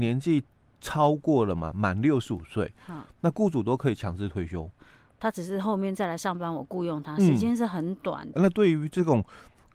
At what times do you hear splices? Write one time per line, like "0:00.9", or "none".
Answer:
0:04.8
0:08.3